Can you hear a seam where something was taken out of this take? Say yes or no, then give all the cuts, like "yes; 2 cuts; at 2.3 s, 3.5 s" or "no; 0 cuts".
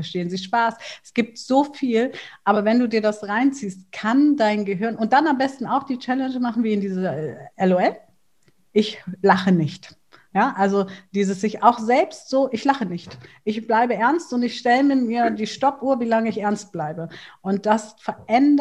no; 0 cuts